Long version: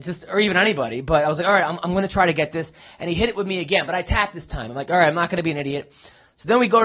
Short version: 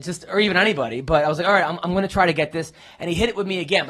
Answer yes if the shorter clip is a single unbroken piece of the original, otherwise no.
yes